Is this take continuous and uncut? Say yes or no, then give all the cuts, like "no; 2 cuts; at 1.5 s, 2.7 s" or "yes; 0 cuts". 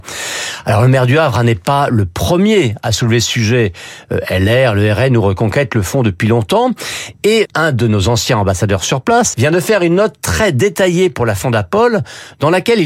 no; 2 cuts; at 7.5 s, 9.3 s